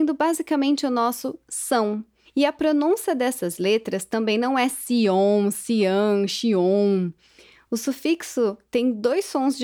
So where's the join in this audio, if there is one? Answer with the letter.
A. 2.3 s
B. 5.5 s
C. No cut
A